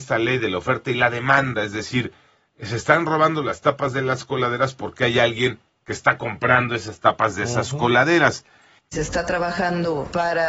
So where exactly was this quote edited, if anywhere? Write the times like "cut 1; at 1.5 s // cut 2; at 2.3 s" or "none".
cut 1; at 8.8 s